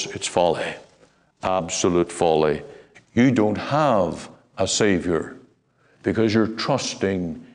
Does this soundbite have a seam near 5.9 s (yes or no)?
no